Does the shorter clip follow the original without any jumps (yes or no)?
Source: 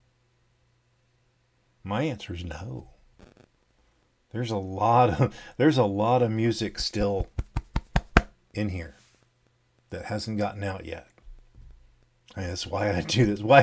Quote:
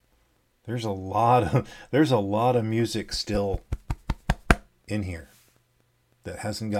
yes